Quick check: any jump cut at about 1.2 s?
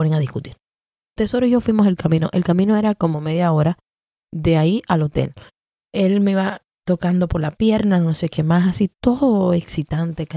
yes; 1 cut; at 1.2 s

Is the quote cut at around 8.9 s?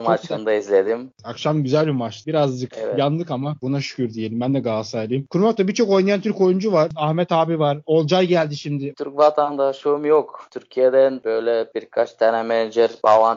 yes; 1 cut; at 8.9 s

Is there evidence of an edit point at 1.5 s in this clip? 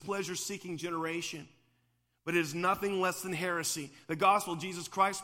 no; 0 cuts

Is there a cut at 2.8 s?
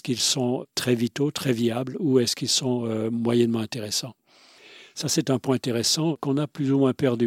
no; 0 cuts

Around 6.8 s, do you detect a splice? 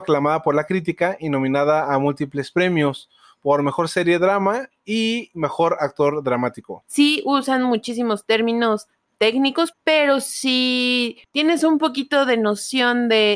yes; 2 cuts; at 6.8 s, 9.7 s

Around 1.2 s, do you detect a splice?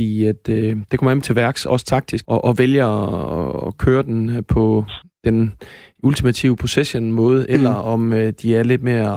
yes; 2 cuts; at 1.2 s, 2.2 s

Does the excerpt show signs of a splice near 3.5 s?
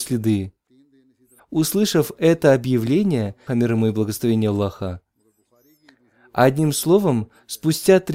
yes; 2 cuts; at 1.4 s, 3.5 s

